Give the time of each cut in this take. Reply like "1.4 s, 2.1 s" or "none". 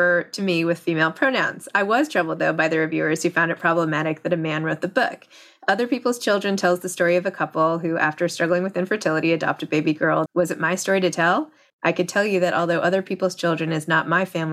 10.3 s, 11.7 s